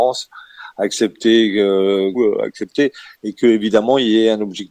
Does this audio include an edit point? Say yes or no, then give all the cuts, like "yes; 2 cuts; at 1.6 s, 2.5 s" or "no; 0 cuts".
yes; 1 cut; at 2.1 s